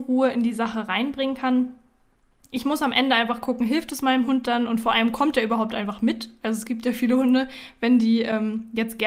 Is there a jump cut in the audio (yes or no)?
yes